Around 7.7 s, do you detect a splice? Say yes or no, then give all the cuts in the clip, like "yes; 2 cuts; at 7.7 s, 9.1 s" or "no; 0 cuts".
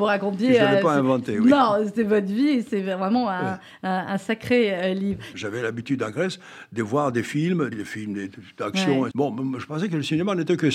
yes; 3 cuts; at 5.3 s, 7.7 s, 9.1 s